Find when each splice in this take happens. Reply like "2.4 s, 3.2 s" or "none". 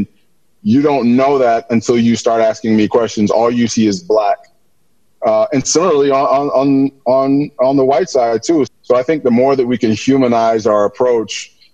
8.7 s